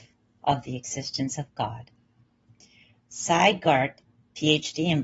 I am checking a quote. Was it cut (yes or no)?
no